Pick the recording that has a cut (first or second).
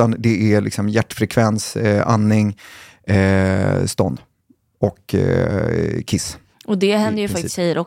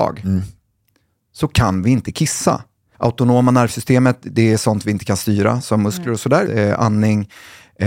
second